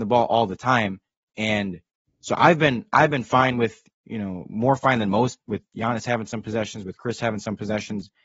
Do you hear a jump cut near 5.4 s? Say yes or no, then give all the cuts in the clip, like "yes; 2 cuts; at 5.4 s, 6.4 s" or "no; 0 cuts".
yes; 1 cut; at 5.4 s